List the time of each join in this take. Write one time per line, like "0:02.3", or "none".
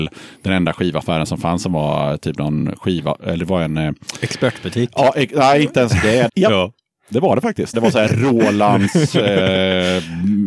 0:06.3
0:07.7